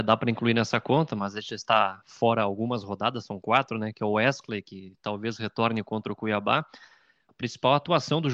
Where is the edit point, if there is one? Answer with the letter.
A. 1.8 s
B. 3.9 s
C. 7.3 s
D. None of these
C